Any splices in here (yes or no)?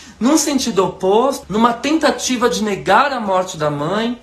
yes